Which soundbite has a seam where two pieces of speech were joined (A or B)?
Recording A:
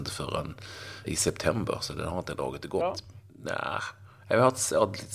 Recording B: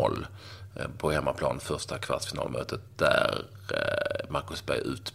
A